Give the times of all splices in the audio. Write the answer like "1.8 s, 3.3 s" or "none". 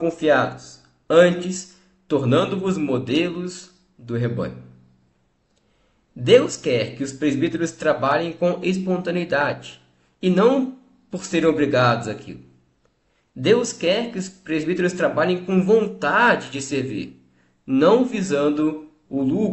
none